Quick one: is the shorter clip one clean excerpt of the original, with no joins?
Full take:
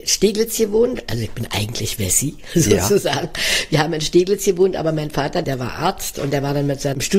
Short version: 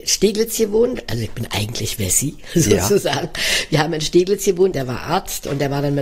no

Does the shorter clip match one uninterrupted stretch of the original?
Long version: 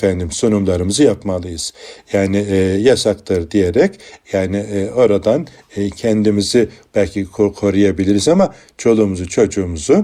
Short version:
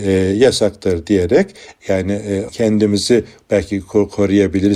no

